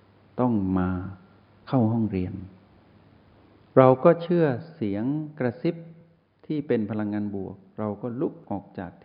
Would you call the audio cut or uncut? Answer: uncut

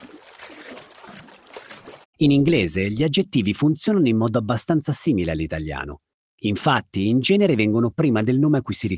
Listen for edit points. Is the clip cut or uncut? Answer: cut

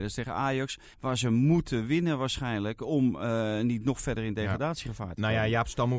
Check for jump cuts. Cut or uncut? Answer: cut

